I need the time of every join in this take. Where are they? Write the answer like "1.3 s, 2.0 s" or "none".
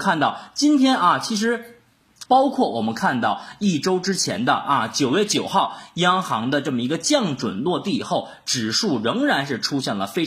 2.3 s

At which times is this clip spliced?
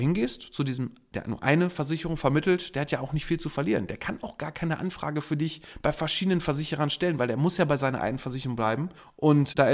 none

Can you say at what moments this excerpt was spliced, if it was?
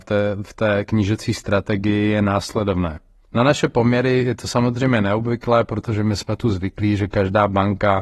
3.2 s

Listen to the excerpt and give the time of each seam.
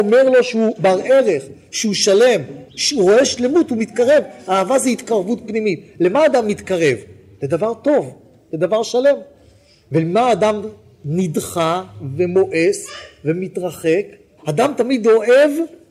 2.7 s, 14.4 s

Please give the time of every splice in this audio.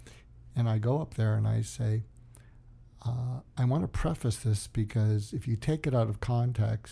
none

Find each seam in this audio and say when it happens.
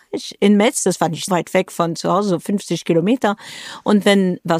1.3 s

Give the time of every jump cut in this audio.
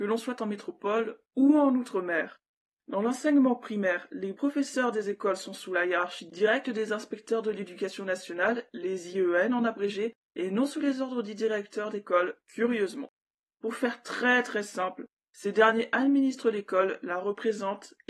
none

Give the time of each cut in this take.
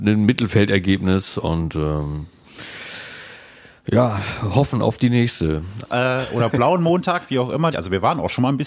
5.8 s, 7.7 s

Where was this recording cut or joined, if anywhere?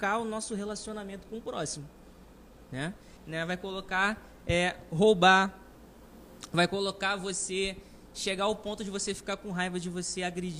3.2 s

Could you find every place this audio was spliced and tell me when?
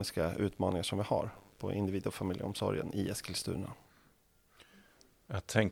none

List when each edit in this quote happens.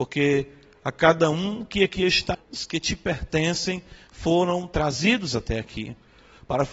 2.3 s

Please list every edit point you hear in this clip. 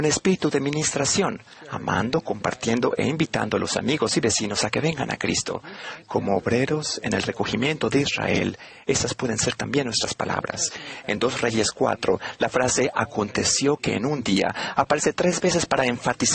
6.0 s, 11.0 s

